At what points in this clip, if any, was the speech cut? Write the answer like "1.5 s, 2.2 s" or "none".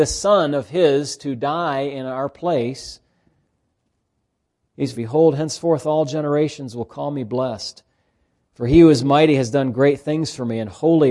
4.9 s